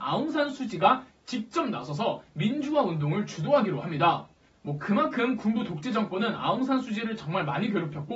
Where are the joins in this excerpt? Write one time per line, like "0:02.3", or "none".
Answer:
0:04.5